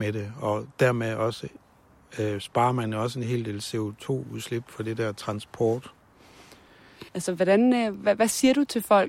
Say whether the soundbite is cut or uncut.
cut